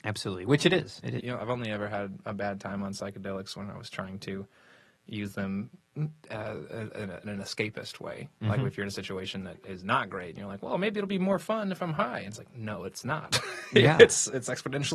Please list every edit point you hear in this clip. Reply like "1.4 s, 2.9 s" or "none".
1.2 s